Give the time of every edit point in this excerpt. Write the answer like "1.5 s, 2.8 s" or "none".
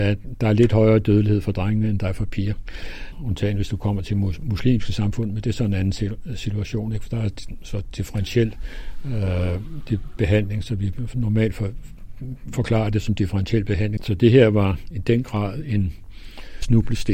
14.0 s